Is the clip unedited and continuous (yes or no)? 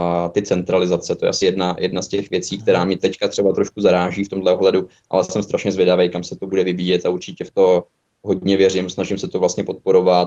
yes